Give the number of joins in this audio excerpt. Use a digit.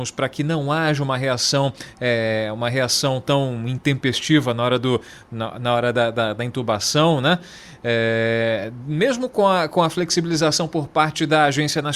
0